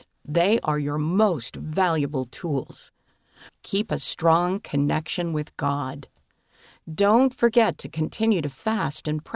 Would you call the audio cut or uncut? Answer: cut